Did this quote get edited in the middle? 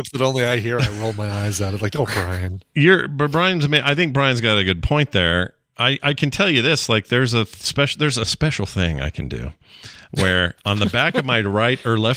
no; 0 cuts

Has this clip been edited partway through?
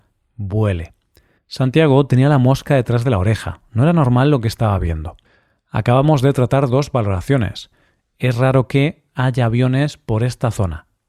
yes; 1 cut; at 1.3 s

